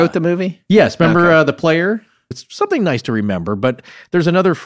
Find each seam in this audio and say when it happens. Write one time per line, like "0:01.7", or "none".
0:02.3